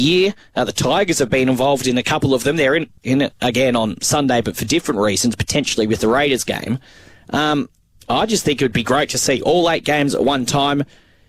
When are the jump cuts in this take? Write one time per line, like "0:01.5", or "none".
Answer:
none